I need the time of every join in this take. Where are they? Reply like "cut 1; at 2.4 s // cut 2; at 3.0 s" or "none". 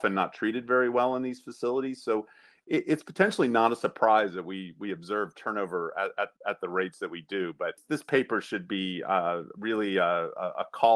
none